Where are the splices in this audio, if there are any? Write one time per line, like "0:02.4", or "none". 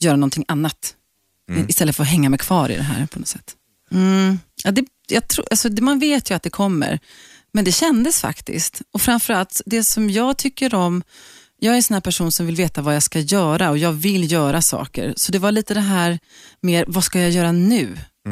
0:03.9